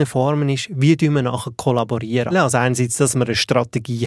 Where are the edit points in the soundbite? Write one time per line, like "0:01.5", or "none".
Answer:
0:02.3